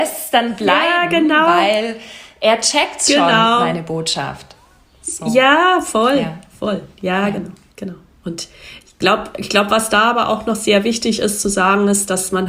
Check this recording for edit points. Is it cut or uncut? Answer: uncut